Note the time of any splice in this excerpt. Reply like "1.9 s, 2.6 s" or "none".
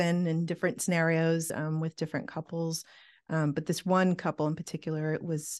none